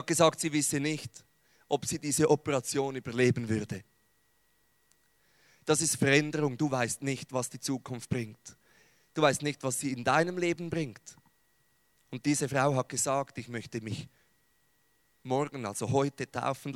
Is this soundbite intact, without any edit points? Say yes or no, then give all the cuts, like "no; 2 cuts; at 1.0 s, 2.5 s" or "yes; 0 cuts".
no; 1 cut; at 12.1 s